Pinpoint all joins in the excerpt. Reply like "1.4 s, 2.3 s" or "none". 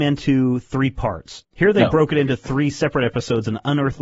1.4 s